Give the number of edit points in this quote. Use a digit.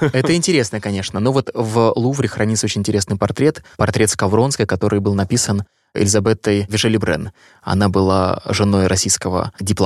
1